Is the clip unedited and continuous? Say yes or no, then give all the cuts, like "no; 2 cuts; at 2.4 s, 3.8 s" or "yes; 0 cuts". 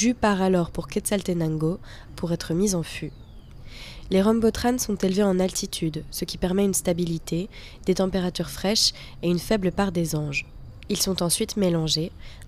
no; 1 cut; at 2.1 s